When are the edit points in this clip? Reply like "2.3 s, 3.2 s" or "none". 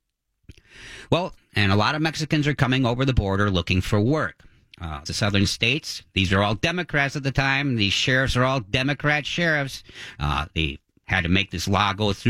1.4 s, 5.1 s, 10.2 s